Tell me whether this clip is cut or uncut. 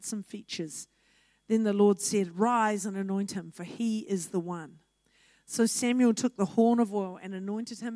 uncut